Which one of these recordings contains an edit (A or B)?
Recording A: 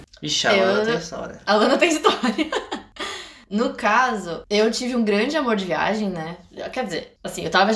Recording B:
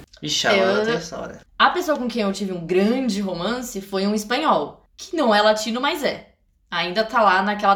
B